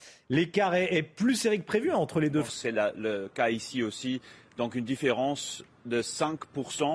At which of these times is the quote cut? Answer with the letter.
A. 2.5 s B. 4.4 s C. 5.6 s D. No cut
A